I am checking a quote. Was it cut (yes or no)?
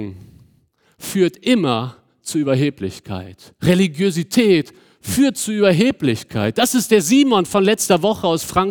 no